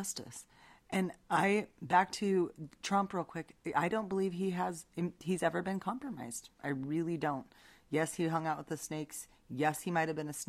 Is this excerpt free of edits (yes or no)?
yes